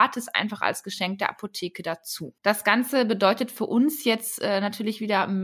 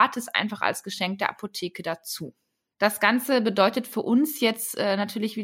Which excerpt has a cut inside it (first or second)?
first